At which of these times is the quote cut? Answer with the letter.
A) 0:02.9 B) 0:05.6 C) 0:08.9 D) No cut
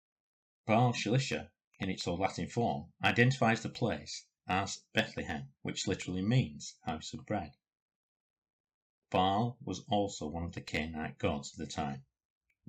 B